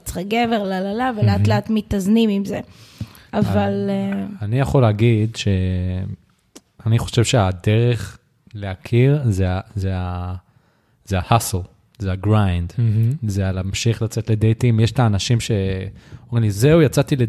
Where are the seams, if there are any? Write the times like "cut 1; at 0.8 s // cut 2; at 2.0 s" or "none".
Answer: none